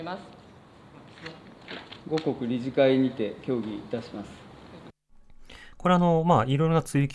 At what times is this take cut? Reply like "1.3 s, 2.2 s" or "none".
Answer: 2.0 s, 5.7 s

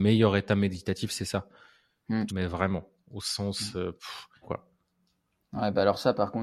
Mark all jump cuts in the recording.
2.3 s, 4.4 s

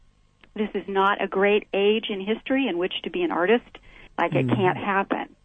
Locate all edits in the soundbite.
4.1 s

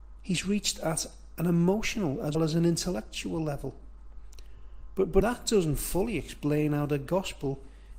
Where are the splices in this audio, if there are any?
2.3 s, 5.2 s

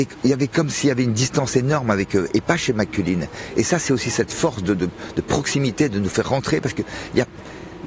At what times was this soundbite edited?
none

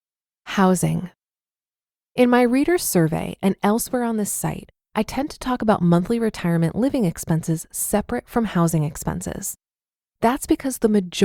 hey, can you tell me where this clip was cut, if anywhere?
none

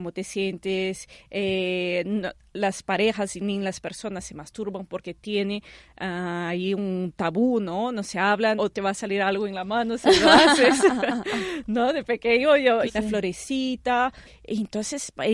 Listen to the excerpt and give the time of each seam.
8.6 s, 12.9 s, 14.3 s

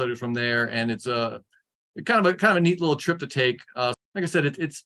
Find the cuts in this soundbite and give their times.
3.9 s

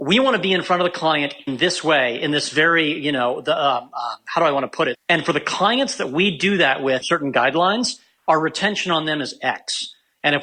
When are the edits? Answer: 4.9 s, 7.0 s

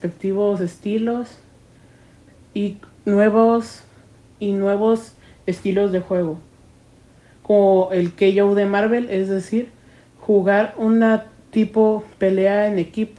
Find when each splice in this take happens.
none

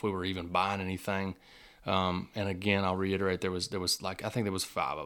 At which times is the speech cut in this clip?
none

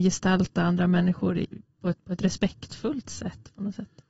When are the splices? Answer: 2.0 s

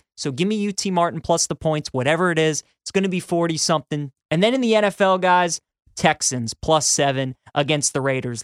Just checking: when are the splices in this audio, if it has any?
4.2 s

